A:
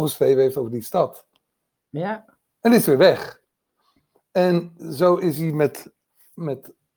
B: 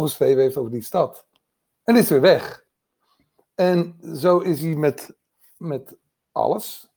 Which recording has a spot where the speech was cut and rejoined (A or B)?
B